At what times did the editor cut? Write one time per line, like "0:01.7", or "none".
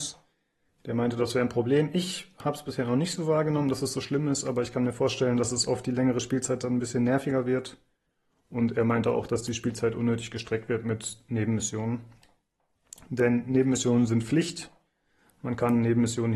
none